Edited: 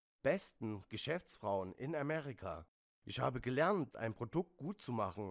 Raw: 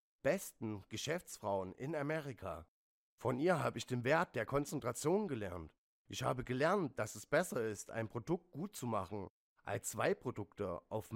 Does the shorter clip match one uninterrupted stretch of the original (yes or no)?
no